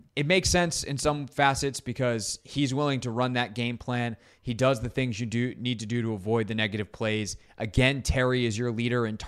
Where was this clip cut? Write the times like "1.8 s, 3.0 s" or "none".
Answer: none